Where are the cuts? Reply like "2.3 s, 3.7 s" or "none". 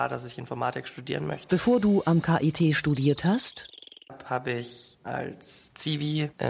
1.5 s

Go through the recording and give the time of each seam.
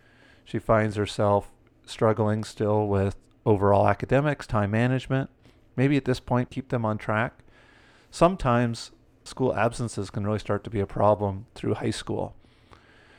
6.5 s, 9.3 s

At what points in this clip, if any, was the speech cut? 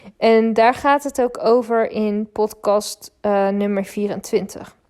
none

